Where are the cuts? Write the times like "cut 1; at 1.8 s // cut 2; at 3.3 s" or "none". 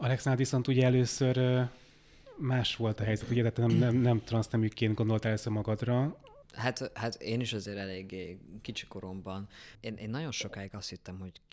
cut 1; at 6.4 s

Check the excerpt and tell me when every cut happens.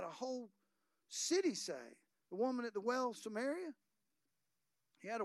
none

